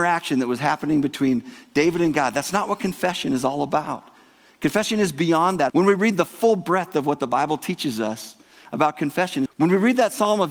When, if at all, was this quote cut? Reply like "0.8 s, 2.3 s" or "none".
5.7 s, 9.5 s